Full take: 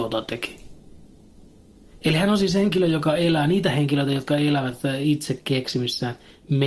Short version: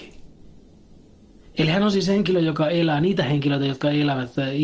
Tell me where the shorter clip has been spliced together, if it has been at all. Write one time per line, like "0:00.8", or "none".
none